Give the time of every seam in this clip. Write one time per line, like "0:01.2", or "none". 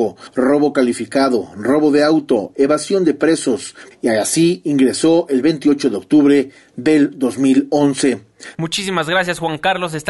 0:03.9
0:08.5